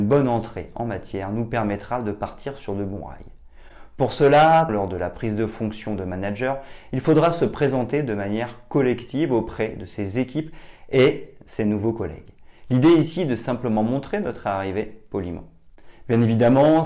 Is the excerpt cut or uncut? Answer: cut